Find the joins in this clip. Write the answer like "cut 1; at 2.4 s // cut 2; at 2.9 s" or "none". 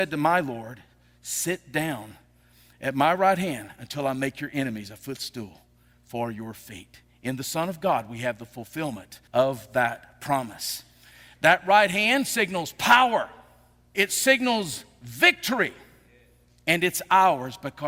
cut 1; at 9.3 s // cut 2; at 13.9 s